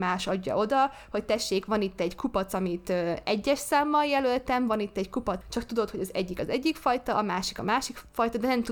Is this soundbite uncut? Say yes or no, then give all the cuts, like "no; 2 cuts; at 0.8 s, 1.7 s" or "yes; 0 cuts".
no; 1 cut; at 5.4 s